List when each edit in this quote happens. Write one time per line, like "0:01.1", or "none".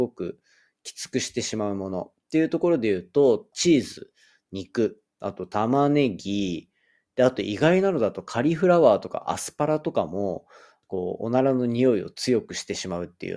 0:03.5
0:10.8